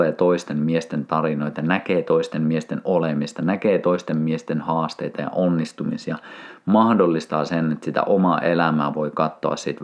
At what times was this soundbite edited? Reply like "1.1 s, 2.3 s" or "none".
none